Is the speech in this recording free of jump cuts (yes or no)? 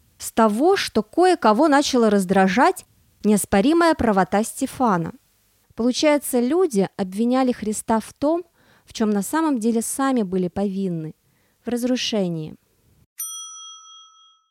no